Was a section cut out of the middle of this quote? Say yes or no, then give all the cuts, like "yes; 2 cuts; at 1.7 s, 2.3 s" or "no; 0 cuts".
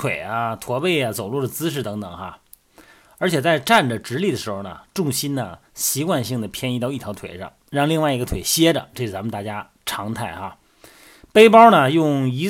no; 0 cuts